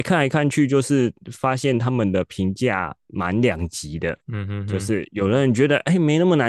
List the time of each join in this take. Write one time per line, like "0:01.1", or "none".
0:04.2